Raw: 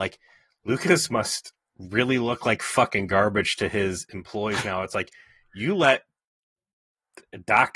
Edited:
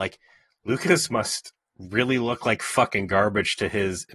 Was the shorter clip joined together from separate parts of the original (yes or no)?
no